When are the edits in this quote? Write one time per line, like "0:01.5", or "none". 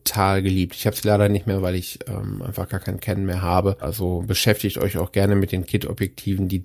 0:03.8